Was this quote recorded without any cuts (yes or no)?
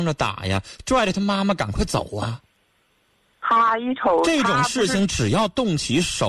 yes